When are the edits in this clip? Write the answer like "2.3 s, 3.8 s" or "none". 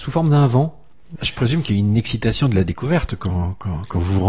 1.2 s

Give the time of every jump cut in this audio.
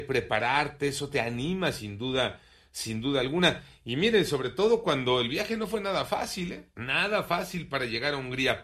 none

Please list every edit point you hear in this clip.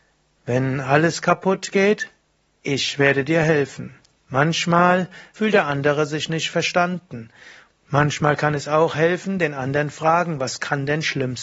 4.2 s, 5.4 s, 7.7 s

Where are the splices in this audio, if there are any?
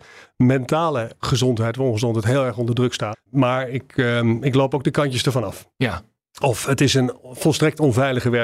3.1 s

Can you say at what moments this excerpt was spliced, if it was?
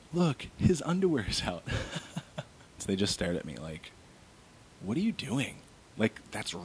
2.8 s

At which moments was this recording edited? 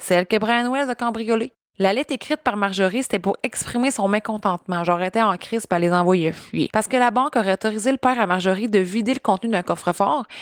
none

